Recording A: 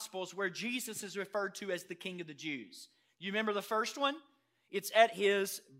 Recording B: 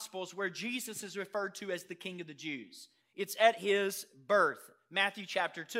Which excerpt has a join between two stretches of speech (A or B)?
B